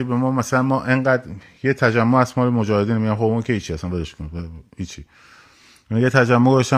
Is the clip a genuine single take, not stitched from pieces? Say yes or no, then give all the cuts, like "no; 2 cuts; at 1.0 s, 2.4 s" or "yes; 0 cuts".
yes; 0 cuts